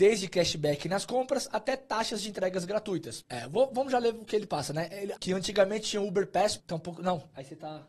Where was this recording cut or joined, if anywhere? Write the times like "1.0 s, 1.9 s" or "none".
3.2 s, 5.2 s, 6.6 s